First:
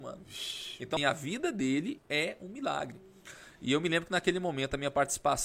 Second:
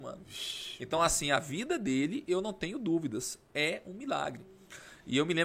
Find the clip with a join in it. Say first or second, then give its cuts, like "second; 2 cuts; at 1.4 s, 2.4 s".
first; 2 cuts; at 1.0 s, 2.0 s